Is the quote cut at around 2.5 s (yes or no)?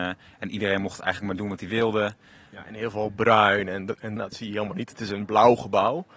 no